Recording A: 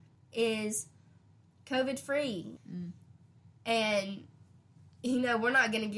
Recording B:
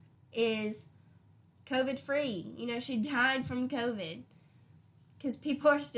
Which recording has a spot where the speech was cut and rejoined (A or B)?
A